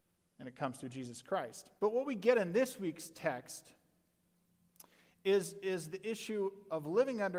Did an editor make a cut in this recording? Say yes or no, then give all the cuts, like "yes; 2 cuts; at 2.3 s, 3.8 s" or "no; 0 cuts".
yes; 1 cut; at 1.8 s